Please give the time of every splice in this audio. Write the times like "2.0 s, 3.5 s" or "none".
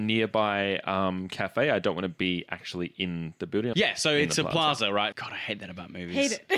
3.7 s, 5.1 s